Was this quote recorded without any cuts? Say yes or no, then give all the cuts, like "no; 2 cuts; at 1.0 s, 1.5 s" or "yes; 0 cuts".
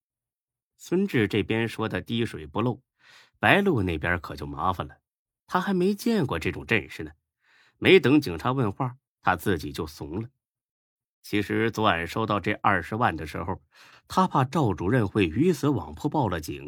no; 1 cut; at 13.9 s